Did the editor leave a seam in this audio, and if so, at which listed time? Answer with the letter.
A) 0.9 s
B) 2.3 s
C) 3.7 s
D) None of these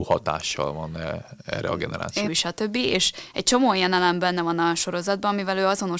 B